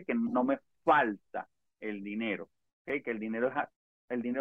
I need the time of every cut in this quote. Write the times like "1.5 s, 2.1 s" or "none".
none